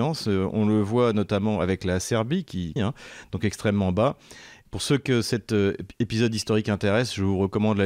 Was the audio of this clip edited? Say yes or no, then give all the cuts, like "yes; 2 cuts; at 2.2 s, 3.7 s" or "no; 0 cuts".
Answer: yes; 2 cuts; at 2.8 s, 4.6 s